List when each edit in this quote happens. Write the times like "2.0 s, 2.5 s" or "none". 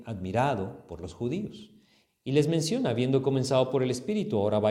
2.1 s

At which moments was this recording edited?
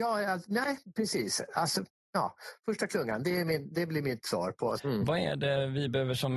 4.8 s

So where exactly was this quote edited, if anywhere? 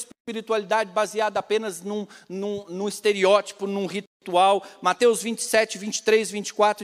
none

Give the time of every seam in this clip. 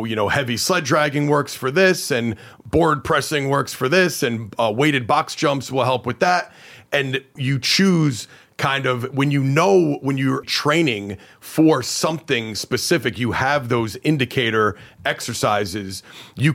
7.4 s, 10.4 s

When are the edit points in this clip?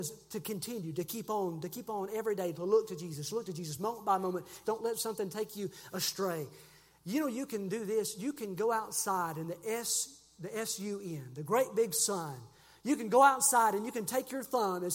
4.6 s

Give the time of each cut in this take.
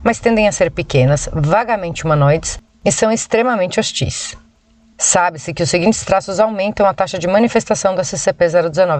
2.7 s, 4.9 s

